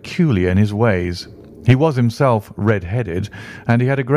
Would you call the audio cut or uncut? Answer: uncut